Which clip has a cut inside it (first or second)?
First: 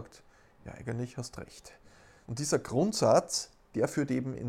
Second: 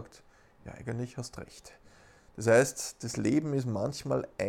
first